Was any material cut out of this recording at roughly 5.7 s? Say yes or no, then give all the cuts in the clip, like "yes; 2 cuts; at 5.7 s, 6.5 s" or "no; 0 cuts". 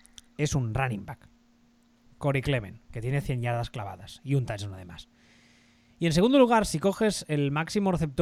no; 0 cuts